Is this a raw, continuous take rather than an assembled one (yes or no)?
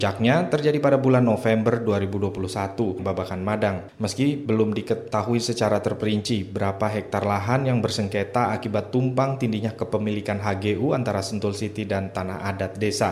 no